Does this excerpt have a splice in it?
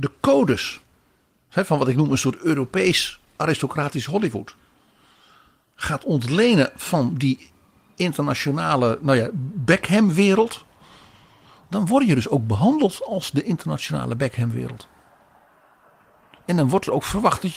no; 0 cuts

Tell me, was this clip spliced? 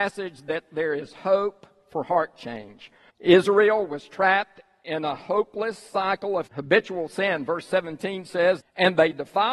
yes; 3 cuts; at 3.1 s, 6.5 s, 8.6 s

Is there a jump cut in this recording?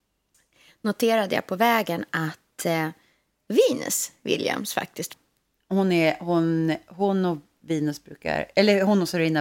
no; 0 cuts

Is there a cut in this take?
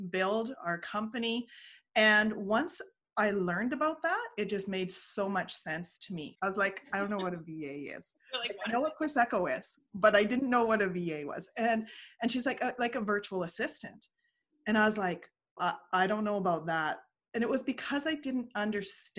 yes; 2 cuts; at 6.3 s, 15.6 s

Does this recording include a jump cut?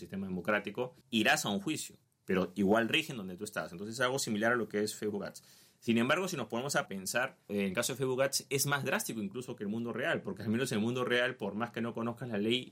yes; 1 cut; at 2.2 s

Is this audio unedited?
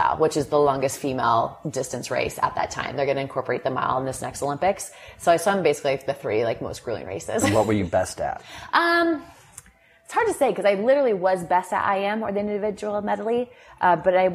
yes; 0 cuts

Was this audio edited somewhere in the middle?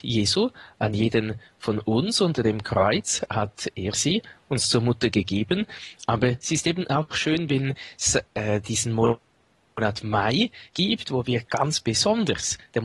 no; 0 cuts

